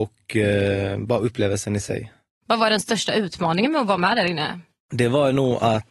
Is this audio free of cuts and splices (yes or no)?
yes